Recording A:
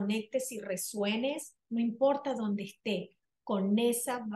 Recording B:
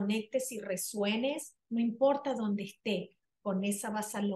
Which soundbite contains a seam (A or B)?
B